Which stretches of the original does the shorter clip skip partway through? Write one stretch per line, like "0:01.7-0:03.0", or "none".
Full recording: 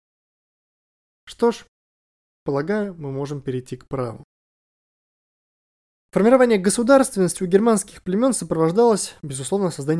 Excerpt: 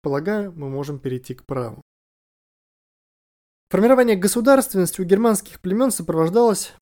none